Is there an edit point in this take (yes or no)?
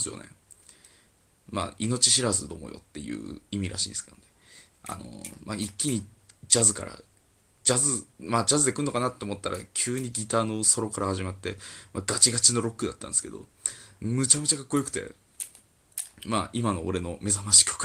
yes